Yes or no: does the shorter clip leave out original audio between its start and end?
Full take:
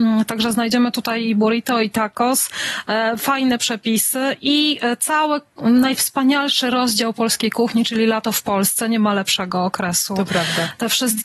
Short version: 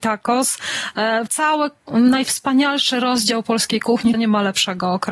yes